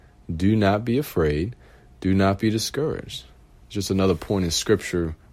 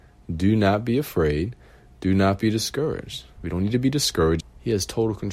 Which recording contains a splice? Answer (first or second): second